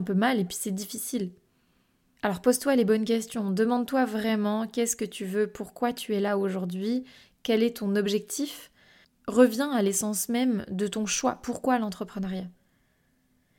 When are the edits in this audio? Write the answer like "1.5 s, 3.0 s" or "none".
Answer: none